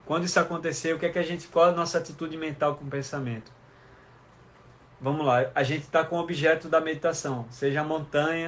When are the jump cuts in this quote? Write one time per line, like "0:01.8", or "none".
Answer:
none